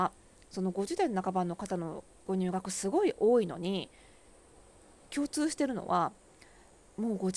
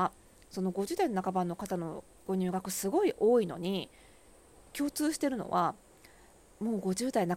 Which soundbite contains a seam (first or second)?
second